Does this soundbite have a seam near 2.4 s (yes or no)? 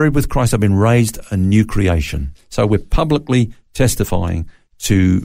no